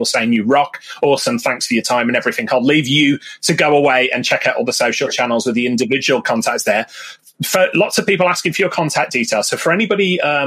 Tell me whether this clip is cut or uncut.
uncut